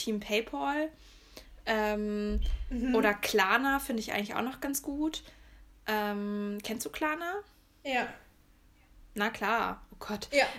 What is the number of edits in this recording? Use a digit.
0